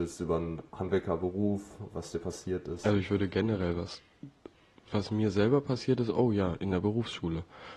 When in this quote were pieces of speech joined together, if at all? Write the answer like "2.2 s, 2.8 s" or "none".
none